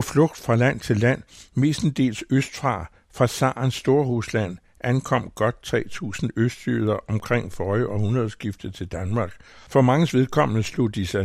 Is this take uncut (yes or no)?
yes